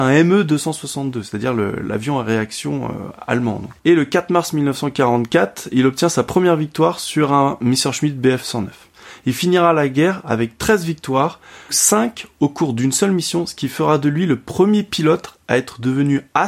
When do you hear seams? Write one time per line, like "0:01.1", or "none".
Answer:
0:03.8
0:11.7